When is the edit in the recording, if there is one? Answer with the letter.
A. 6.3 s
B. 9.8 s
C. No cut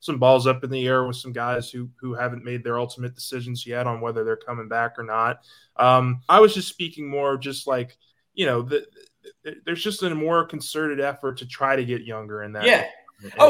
A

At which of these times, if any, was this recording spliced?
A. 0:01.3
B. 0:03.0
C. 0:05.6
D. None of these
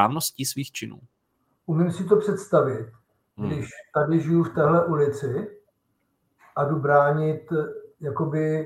D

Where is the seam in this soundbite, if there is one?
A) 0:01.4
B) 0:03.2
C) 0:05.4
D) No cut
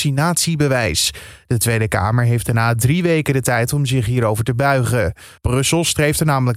C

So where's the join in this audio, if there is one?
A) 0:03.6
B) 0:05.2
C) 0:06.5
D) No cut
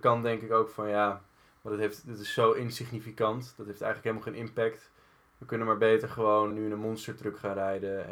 C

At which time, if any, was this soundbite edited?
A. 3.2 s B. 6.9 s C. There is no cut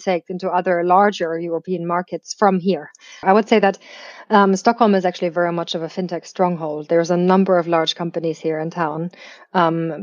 A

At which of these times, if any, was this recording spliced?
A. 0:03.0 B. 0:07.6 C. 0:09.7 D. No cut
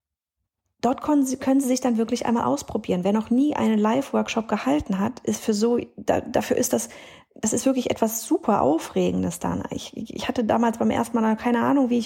D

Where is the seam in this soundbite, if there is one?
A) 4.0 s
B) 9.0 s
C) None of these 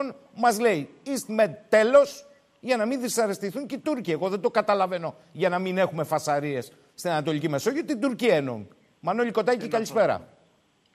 C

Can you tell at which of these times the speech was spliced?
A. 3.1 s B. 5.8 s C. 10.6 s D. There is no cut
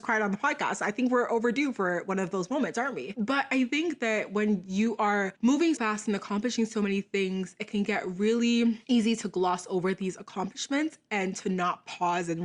B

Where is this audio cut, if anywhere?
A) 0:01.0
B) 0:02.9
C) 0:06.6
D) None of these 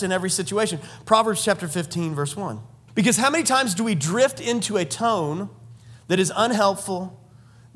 B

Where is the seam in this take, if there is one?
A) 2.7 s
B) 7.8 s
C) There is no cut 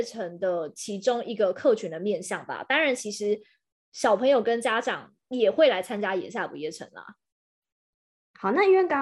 C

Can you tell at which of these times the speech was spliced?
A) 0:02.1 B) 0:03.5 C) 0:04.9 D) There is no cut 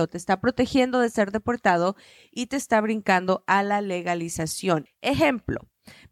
C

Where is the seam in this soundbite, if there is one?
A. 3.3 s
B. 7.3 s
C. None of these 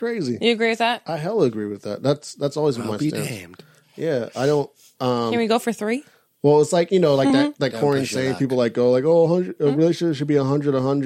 C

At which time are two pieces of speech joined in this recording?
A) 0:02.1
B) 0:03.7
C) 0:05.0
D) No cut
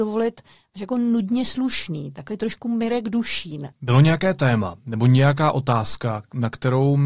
B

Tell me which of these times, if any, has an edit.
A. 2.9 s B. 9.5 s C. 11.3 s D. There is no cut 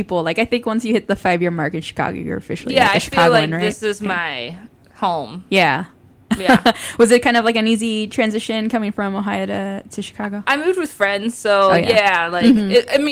D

